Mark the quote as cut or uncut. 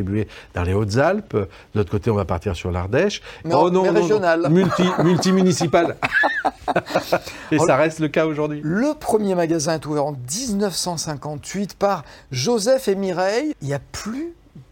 cut